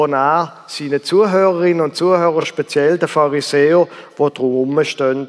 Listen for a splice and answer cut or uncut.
uncut